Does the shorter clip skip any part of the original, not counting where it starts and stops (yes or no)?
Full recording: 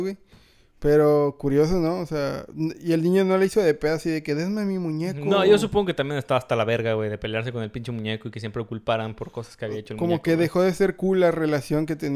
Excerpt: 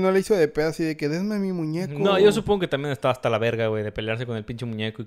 no